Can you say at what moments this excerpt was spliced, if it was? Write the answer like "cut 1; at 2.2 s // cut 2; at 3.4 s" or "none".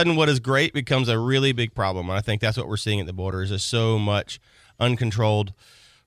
none